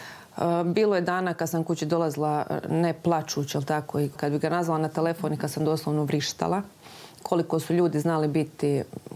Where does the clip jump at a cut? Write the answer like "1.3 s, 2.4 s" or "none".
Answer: 4.1 s